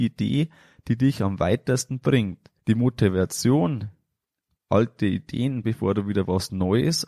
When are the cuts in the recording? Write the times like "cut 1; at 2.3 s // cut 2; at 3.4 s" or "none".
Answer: cut 1; at 2.6 s // cut 2; at 5.6 s